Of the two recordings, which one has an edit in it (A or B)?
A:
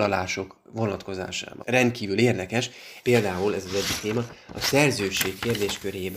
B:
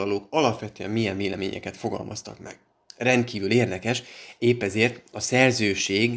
A